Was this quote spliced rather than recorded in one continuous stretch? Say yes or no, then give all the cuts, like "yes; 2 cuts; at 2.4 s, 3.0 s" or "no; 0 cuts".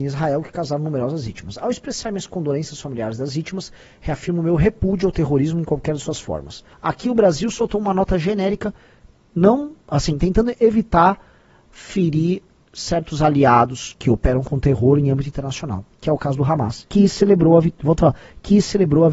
yes; 1 cut; at 6.7 s